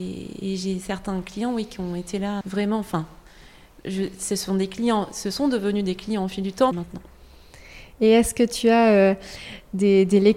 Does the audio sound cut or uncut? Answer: cut